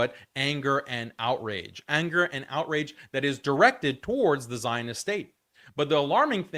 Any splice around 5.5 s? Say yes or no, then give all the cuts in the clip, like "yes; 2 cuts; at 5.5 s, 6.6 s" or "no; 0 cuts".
no; 0 cuts